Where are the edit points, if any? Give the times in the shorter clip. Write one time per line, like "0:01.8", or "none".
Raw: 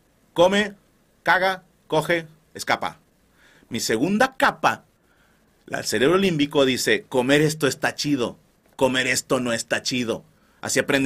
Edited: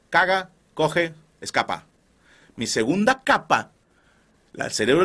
none